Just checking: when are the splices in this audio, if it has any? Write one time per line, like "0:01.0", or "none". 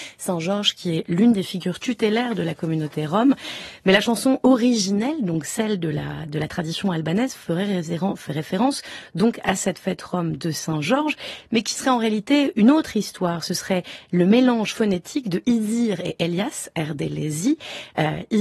none